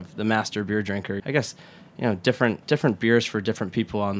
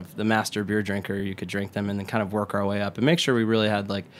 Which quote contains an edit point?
first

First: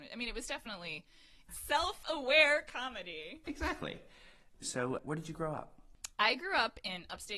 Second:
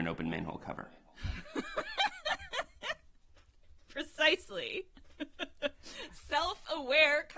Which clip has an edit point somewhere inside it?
first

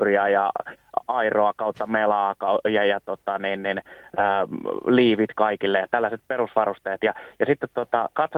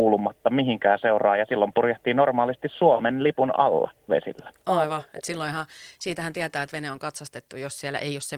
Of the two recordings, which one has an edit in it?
second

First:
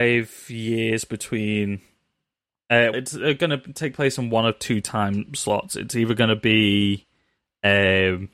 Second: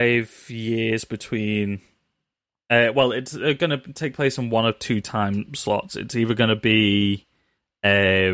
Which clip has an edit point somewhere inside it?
first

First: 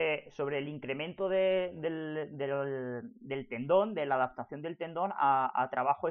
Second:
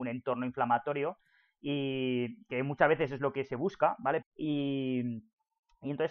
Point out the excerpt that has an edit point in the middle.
second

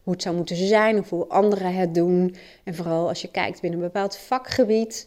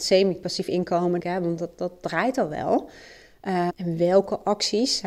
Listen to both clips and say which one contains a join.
second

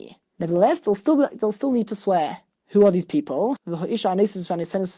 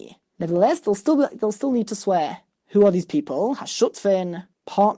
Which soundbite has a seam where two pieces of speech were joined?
first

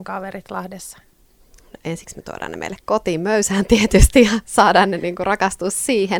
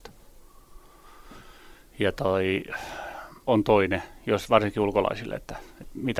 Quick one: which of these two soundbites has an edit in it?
second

